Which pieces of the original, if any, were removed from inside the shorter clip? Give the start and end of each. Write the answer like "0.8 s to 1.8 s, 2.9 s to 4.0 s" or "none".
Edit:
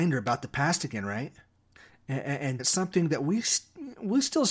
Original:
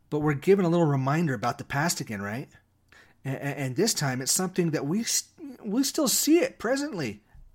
3.8 s to 4.2 s